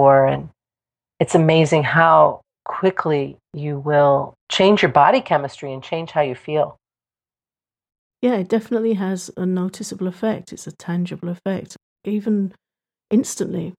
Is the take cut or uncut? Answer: uncut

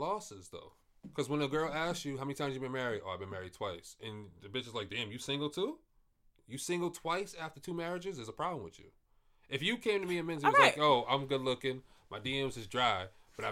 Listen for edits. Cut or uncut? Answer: uncut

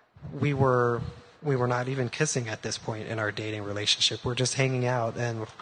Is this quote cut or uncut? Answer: uncut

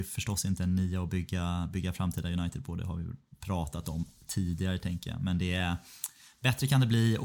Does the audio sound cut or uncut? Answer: uncut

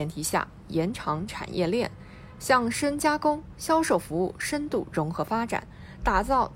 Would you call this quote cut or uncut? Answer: uncut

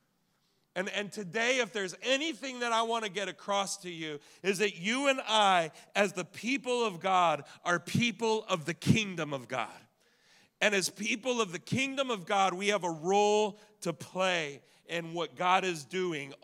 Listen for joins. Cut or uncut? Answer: uncut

